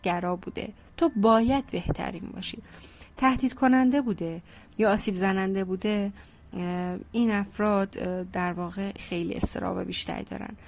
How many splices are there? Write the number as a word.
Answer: one